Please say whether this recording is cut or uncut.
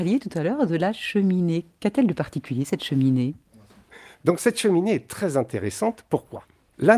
uncut